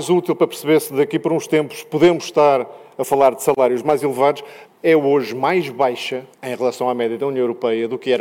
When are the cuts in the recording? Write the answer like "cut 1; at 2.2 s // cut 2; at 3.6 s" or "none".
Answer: cut 1; at 4.7 s // cut 2; at 6.3 s